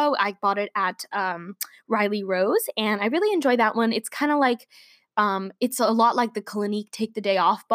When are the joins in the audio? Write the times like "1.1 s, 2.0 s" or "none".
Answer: none